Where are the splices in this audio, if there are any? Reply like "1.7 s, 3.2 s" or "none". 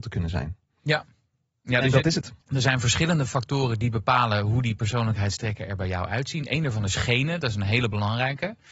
2.4 s